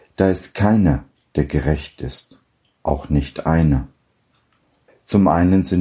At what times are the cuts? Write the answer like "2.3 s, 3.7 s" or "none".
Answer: 4.9 s